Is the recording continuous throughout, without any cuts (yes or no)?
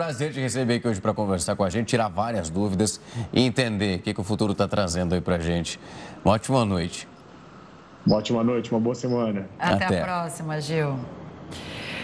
yes